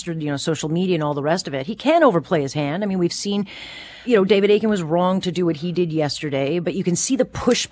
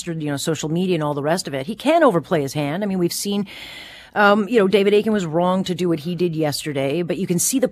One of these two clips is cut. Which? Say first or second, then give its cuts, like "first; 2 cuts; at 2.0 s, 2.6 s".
first; 1 cut; at 4.0 s